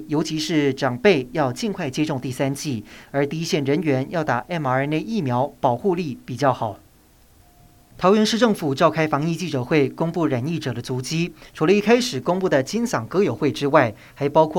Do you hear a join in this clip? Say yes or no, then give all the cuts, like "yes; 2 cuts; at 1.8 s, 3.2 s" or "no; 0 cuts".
no; 0 cuts